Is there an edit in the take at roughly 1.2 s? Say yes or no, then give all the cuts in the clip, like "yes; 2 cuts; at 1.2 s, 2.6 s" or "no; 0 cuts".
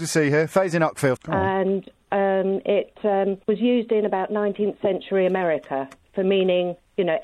yes; 2 cuts; at 1.2 s, 3.4 s